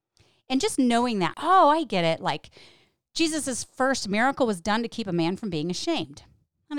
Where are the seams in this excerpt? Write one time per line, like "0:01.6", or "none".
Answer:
0:01.3